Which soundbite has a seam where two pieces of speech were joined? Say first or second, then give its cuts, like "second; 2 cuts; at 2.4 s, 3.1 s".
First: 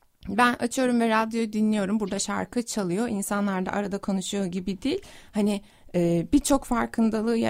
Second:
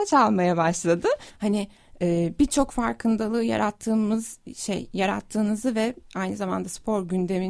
second; 1 cut; at 1.3 s